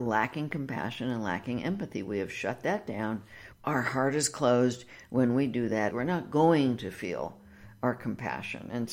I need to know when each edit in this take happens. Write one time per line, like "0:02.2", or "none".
0:03.5
0:05.9